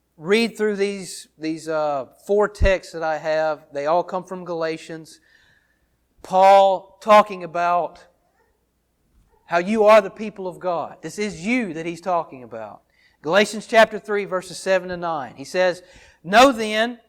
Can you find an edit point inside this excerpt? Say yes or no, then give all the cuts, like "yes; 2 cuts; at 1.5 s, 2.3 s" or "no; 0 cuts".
no; 0 cuts